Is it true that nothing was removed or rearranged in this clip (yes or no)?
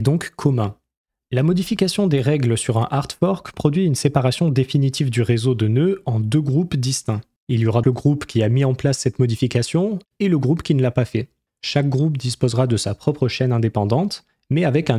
no